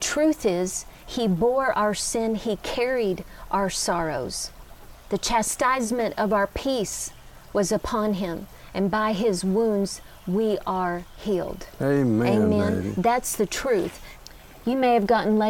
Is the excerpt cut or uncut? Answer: uncut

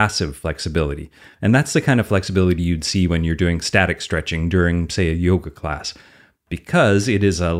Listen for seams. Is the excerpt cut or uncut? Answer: uncut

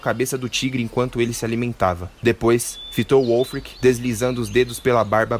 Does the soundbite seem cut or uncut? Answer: uncut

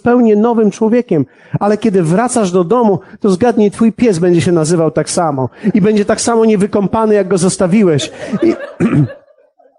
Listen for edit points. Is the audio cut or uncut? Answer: uncut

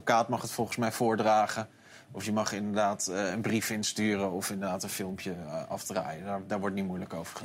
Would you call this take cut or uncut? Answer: uncut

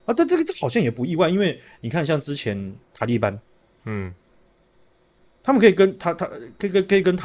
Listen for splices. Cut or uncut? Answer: uncut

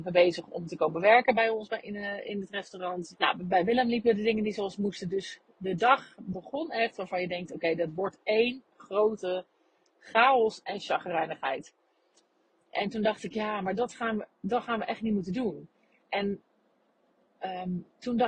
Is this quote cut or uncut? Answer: cut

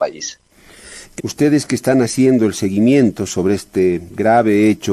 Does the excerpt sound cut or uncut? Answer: cut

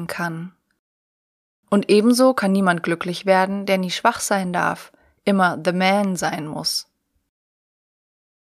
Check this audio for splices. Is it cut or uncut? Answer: uncut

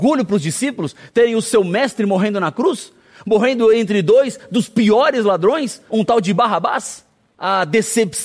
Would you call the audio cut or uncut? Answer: cut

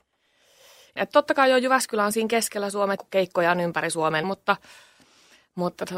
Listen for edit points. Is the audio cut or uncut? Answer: cut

